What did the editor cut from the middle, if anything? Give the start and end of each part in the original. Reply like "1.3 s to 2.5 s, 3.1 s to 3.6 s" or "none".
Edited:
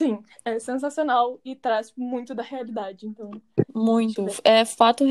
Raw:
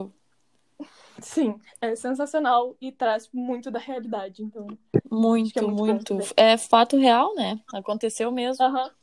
5.5 s to 6.1 s